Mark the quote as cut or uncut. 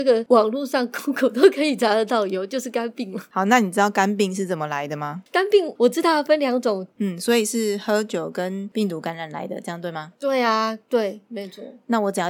cut